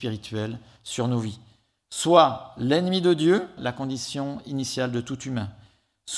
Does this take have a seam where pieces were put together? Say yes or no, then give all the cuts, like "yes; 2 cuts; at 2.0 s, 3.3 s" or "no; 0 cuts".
yes; 1 cut; at 3.6 s